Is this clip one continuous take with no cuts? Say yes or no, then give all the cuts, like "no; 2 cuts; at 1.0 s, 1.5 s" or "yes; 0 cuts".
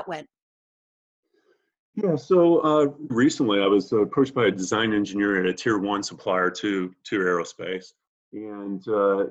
no; 1 cut; at 3.1 s